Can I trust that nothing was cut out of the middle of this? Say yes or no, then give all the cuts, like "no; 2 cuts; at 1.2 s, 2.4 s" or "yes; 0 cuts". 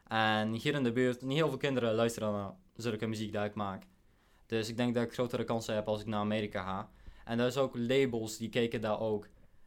no; 1 cut; at 1.2 s